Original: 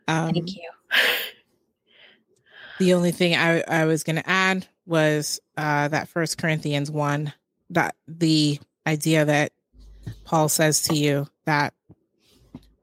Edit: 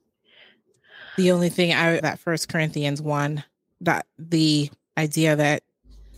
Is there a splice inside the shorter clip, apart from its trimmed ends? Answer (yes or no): yes